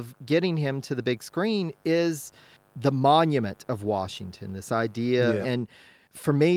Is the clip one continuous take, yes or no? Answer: no